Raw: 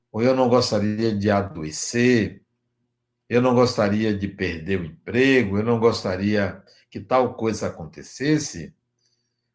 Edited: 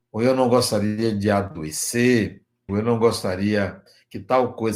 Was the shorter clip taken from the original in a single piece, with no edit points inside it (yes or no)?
no